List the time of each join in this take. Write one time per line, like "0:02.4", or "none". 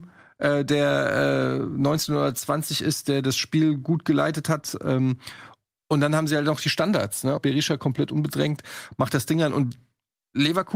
0:07.4